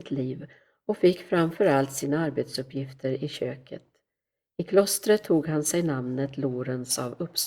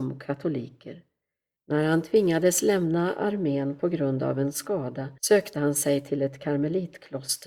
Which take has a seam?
second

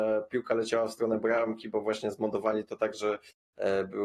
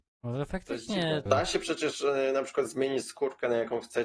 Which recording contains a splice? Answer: second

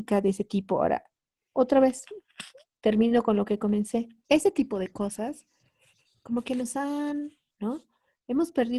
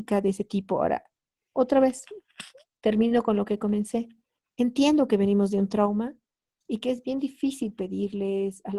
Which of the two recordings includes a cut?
first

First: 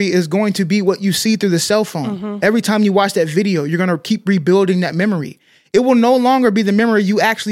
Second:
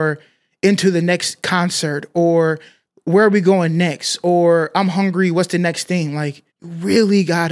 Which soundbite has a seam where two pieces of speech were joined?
second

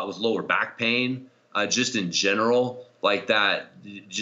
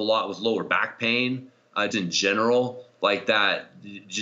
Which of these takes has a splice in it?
second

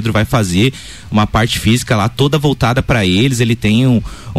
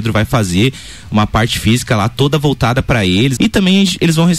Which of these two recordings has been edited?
second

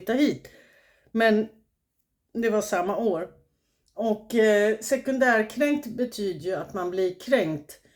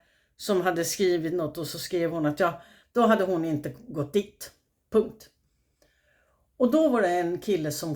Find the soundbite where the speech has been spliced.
second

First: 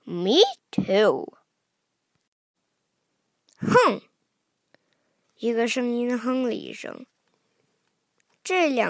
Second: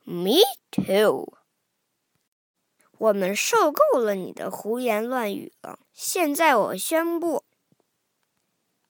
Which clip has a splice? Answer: second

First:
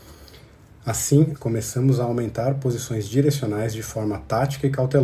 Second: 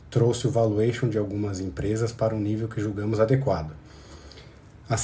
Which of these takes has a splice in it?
first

